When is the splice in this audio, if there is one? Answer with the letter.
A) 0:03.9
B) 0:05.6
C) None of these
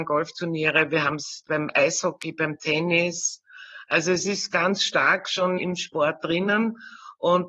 B